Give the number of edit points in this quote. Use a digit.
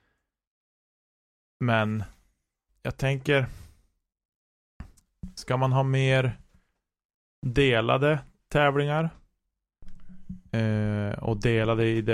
1